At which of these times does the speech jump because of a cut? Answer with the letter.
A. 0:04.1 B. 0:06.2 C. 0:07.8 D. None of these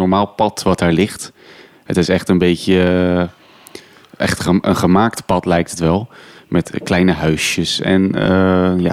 D